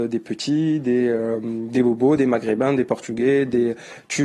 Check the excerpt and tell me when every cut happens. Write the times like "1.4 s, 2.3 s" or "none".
2.2 s